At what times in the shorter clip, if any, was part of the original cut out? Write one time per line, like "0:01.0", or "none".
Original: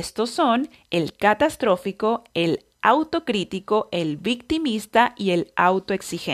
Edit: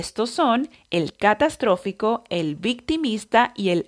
0:02.3